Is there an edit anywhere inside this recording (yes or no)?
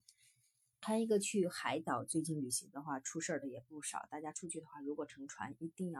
no